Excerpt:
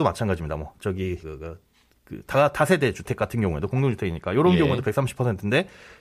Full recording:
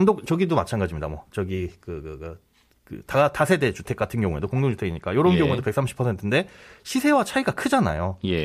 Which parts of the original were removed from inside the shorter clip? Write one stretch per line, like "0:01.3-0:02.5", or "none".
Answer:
0:01.7-0:02.0